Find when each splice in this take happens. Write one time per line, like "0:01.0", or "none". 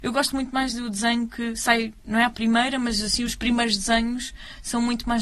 none